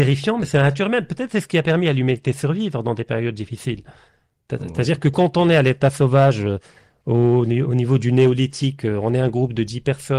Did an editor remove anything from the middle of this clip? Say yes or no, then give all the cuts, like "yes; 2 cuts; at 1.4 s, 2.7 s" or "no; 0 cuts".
no; 0 cuts